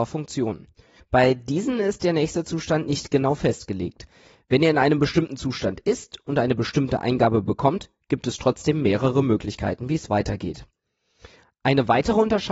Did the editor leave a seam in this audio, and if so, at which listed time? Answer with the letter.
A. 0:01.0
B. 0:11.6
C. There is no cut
A